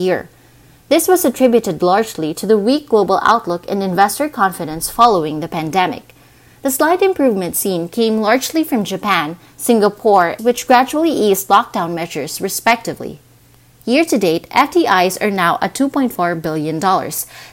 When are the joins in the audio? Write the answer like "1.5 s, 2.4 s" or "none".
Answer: 10.4 s